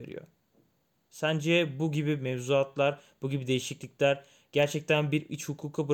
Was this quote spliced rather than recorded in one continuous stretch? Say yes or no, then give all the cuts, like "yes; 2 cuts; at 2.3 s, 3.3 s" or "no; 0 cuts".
yes; 1 cut; at 0.9 s